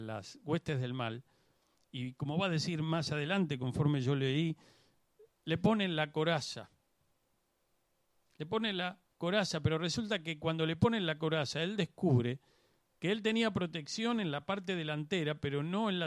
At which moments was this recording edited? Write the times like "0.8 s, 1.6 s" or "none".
none